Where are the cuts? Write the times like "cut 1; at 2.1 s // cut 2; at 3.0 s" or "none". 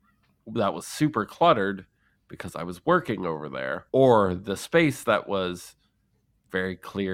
cut 1; at 3.9 s